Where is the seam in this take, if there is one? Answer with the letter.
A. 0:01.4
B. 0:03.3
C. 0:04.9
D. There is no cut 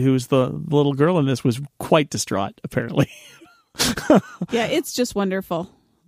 D